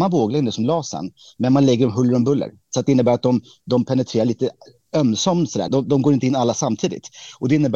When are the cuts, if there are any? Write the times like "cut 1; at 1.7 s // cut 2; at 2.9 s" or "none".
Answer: cut 1; at 5.7 s